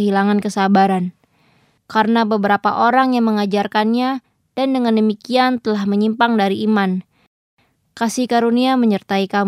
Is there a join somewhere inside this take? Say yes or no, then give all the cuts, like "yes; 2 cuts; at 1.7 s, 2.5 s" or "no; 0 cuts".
yes; 1 cut; at 1.8 s